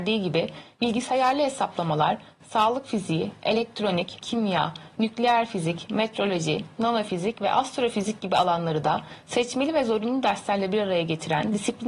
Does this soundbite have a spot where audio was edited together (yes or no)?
yes